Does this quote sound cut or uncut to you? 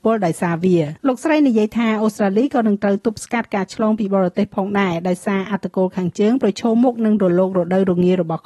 cut